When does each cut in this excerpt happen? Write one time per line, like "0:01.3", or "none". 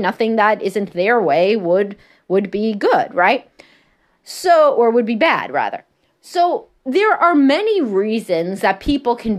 none